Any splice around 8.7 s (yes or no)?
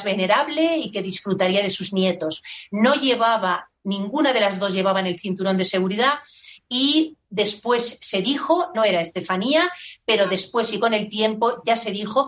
yes